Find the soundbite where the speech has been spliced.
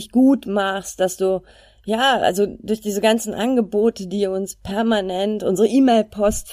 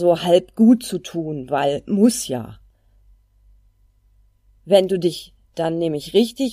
second; 1 cut; at 4.6 s

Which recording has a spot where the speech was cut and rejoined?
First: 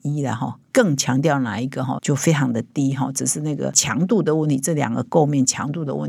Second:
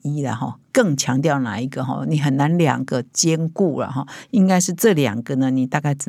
first; 1 cut; at 2.0 s

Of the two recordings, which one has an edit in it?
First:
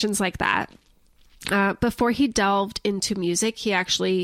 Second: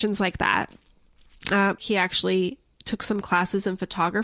second; 1 cut; at 1.8 s

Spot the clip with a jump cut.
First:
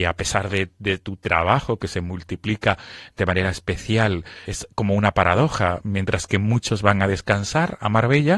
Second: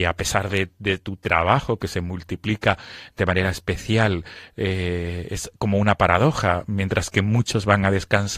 first; 1 cut; at 4.5 s

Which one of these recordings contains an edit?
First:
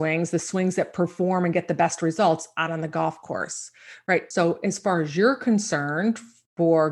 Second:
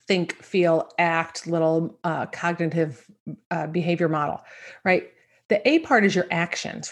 first; 1 cut; at 4.3 s

